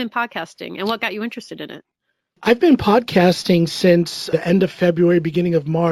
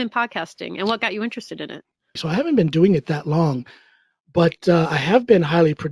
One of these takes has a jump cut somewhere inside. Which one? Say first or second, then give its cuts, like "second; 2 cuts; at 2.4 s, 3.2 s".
second; 1 cut; at 2.2 s